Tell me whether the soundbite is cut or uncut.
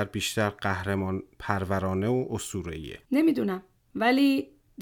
cut